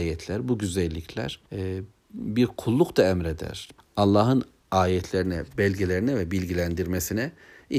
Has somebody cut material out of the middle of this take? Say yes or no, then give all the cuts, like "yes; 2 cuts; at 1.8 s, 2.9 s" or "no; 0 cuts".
yes; 2 cuts; at 1.5 s, 3.8 s